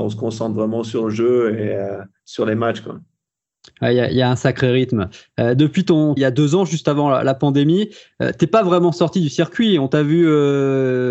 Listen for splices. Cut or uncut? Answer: cut